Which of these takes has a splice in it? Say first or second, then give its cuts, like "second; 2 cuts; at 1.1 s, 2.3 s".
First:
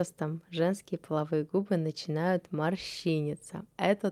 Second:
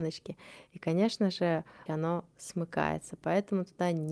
second; 1 cut; at 1.9 s